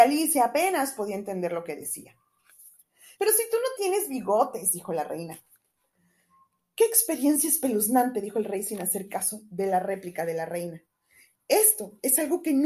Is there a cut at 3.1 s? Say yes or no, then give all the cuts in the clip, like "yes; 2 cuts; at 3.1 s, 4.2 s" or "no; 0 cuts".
yes; 1 cut; at 3.1 s